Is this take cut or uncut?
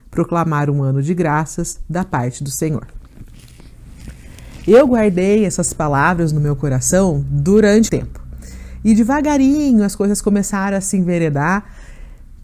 cut